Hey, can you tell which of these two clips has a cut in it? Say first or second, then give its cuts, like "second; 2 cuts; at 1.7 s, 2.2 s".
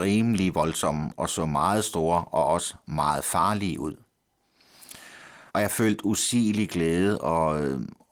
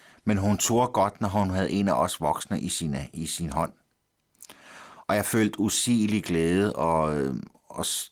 first; 1 cut; at 5.5 s